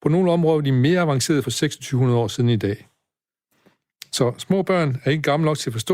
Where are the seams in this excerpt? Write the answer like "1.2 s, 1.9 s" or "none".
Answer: none